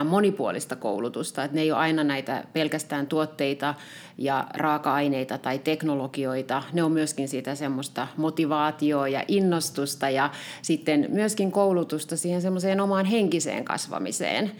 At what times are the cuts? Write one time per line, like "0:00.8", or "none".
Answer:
none